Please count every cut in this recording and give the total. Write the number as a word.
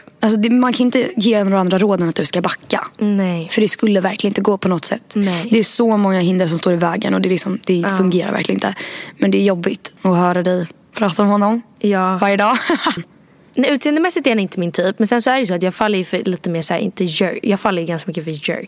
two